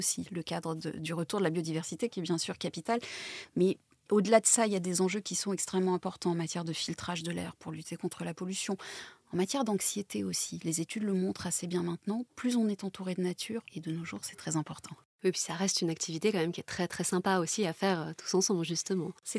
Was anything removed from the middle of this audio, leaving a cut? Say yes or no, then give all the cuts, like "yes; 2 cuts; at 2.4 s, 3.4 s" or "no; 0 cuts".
yes; 1 cut; at 13.7 s